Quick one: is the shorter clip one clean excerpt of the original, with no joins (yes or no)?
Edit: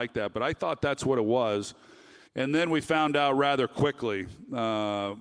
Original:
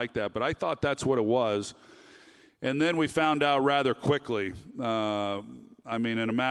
no